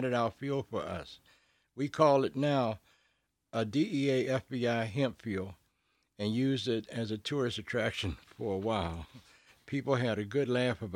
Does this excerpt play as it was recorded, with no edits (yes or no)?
yes